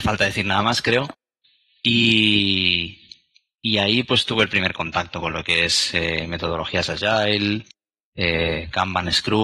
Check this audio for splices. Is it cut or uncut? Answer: uncut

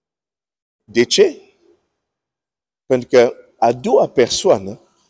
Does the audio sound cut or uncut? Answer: cut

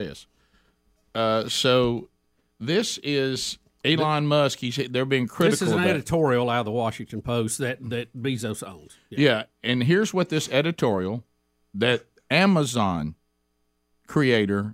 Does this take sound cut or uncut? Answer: uncut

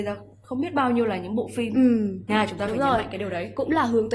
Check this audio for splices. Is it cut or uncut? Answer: cut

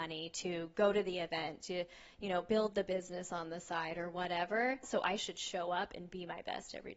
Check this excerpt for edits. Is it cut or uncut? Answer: cut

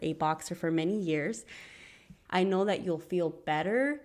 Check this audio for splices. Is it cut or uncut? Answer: cut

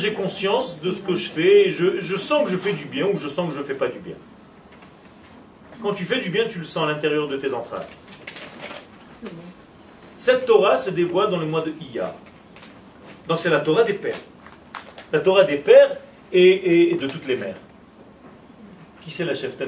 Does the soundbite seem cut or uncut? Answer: cut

